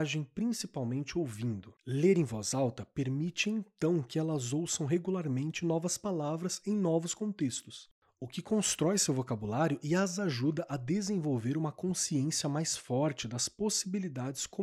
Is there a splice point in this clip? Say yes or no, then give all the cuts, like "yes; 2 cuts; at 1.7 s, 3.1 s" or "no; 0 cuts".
no; 0 cuts